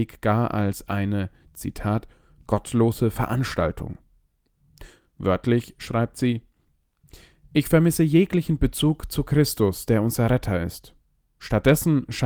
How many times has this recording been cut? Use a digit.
0